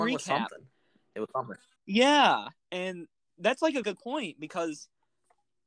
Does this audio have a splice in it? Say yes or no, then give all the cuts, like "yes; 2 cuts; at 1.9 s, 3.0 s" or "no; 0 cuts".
yes; 2 cuts; at 1.8 s, 3.8 s